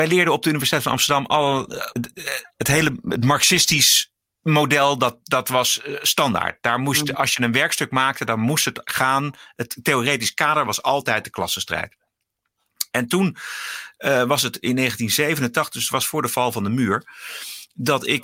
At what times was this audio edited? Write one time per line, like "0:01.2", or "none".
0:01.9